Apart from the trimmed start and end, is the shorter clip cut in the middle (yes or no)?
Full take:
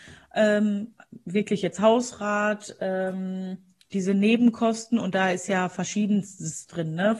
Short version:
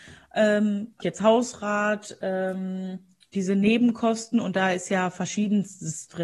yes